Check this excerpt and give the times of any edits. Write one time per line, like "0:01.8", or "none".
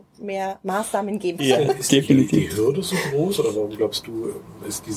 0:01.4